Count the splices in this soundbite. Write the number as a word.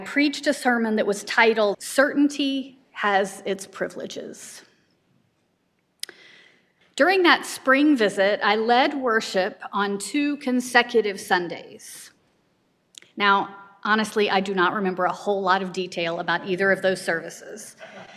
two